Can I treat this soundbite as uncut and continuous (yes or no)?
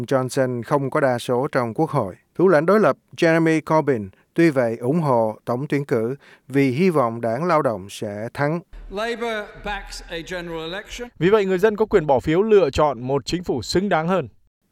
no